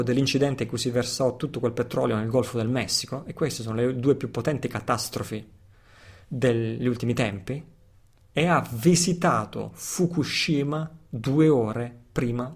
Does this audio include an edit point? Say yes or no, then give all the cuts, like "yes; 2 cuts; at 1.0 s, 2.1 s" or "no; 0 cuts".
no; 0 cuts